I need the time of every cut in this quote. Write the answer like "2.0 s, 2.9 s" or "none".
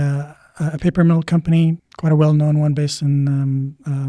1.8 s